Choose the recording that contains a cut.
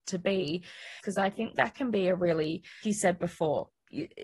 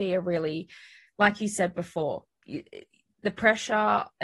first; 2 cuts; at 1.0 s, 2.8 s

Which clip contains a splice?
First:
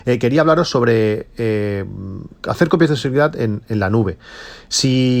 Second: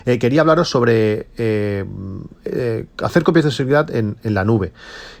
first; 1 cut; at 2.4 s

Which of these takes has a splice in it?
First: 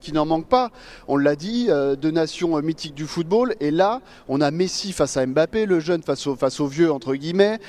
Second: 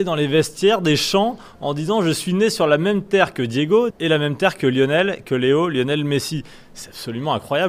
second; 1 cut; at 3.9 s

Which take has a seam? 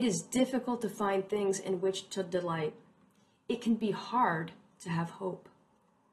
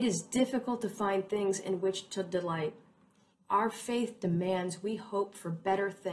second; 1 cut; at 3.3 s

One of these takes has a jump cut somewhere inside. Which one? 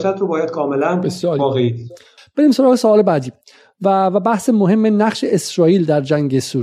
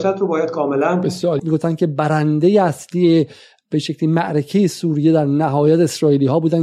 second; 1 cut; at 1.4 s

